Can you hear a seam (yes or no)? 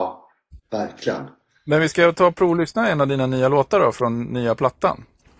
no